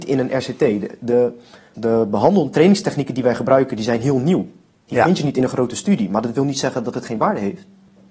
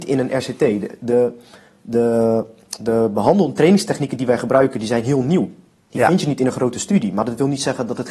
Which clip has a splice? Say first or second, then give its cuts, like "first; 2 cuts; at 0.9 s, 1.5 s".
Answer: first; 1 cut; at 1.7 s